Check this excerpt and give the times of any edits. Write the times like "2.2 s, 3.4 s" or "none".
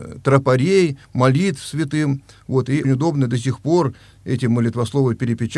2.8 s